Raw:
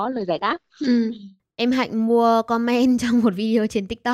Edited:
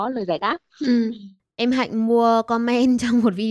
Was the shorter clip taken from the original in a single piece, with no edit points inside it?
yes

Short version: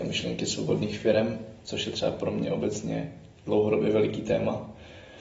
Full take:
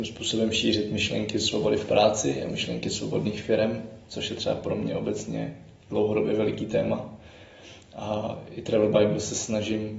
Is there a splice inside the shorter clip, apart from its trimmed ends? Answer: no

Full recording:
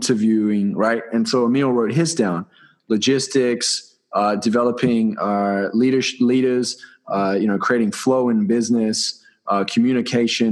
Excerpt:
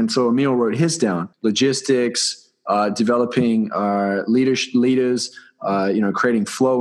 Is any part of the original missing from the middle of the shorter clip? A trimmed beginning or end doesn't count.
yes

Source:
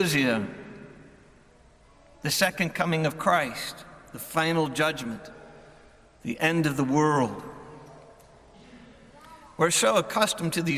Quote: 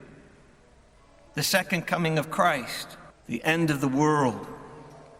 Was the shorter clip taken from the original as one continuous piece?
no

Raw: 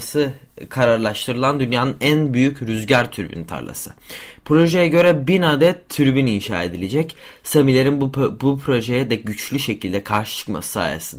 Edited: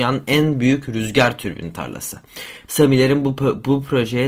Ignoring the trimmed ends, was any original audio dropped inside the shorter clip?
yes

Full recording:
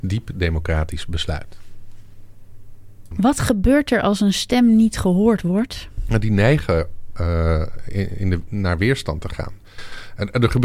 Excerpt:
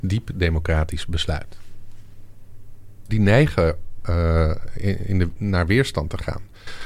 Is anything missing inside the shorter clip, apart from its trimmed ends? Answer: yes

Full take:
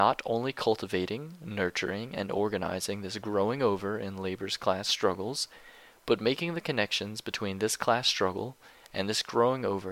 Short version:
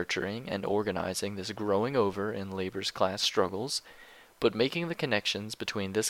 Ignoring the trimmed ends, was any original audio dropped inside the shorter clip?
no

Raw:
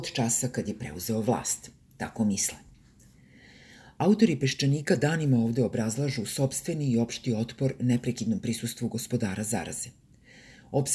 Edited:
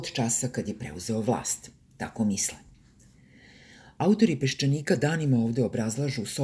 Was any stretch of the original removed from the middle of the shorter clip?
no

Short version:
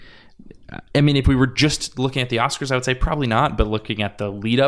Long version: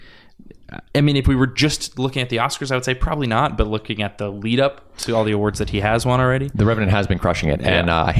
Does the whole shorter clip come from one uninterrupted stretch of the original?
yes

